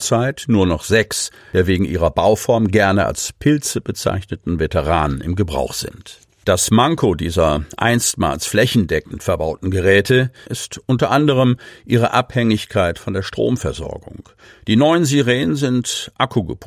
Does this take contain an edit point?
yes; 1 cut; at 10.4 s

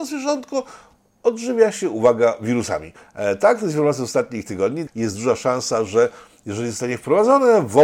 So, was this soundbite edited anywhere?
yes; 1 cut; at 4.9 s

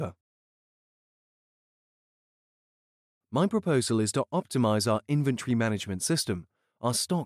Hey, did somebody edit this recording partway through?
no; 0 cuts

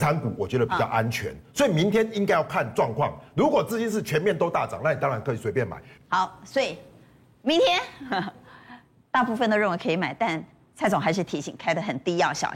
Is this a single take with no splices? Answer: no; 1 cut; at 6.0 s

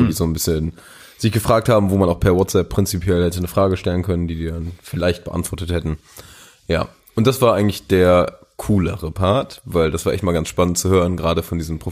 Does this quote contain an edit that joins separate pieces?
no; 0 cuts

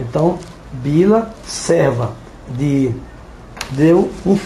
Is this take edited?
yes; 1 cut; at 1.4 s

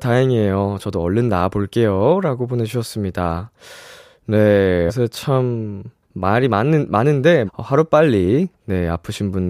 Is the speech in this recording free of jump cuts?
no; 3 cuts; at 4.9 s, 6.0 s, 7.5 s

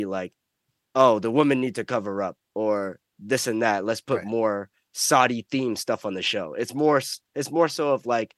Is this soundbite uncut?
yes; 0 cuts

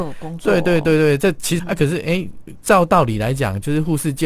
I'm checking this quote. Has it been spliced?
yes; 1 cut; at 1.6 s

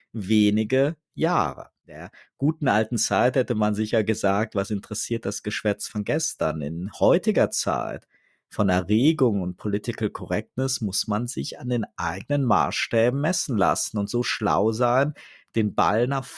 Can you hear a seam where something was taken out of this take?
no; 0 cuts

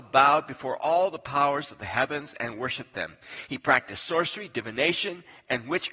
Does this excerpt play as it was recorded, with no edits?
no; 1 cut; at 3.5 s

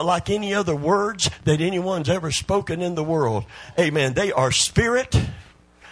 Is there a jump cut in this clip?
no; 0 cuts

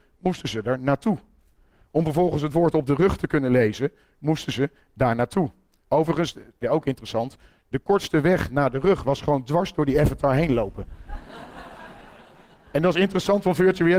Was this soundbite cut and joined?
yes; 1 cut; at 6.6 s

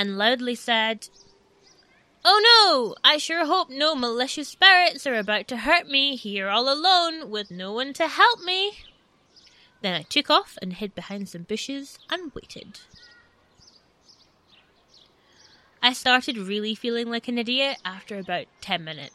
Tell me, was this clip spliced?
no; 0 cuts

